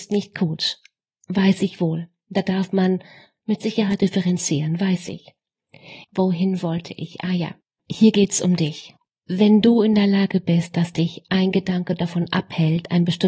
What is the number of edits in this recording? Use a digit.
1